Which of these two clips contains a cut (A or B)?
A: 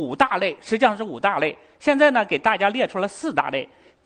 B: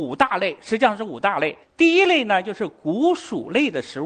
B